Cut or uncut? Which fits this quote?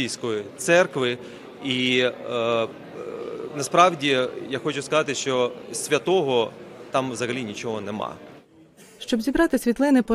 uncut